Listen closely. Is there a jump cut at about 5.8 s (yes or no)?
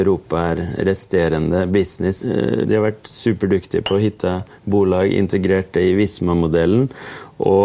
no